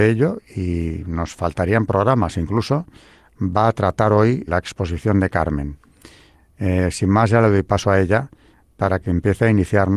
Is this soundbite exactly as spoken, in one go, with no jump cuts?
no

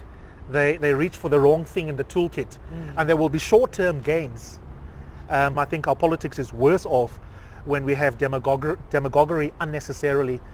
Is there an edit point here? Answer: yes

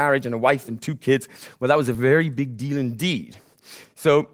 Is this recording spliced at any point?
no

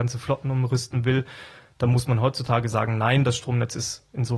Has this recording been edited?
no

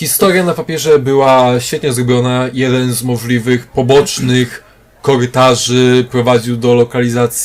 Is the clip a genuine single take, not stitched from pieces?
yes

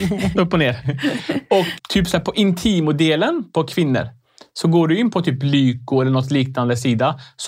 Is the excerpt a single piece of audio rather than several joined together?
no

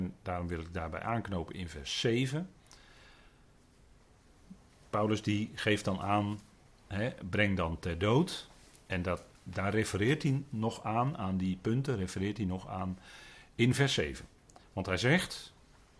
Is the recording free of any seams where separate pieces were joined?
yes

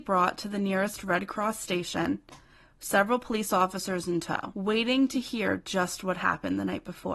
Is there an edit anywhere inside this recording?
no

